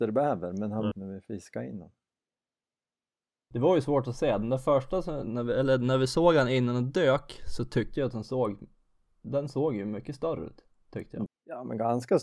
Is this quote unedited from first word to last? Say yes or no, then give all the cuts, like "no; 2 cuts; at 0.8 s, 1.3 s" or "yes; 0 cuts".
no; 2 cuts; at 0.9 s, 11.3 s